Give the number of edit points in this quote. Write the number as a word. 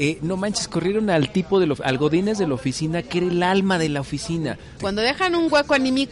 one